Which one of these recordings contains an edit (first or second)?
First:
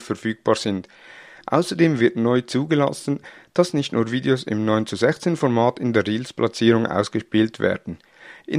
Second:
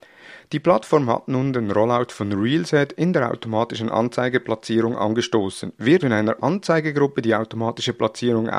second